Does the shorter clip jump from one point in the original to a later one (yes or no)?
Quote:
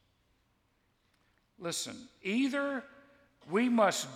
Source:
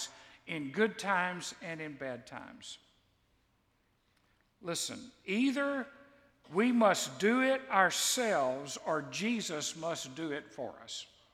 no